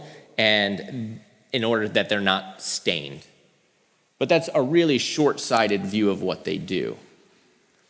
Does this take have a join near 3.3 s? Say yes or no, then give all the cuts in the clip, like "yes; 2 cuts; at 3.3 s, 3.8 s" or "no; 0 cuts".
no; 0 cuts